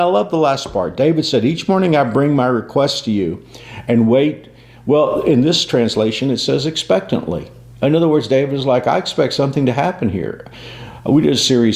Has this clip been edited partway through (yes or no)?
no